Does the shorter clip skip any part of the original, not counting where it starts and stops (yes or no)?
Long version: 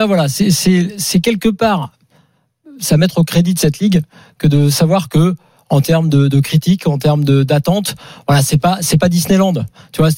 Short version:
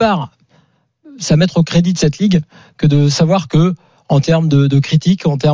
no